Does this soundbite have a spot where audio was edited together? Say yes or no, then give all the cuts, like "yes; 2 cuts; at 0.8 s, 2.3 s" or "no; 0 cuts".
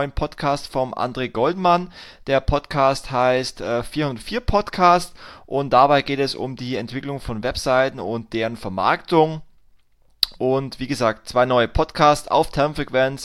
yes; 1 cut; at 10.4 s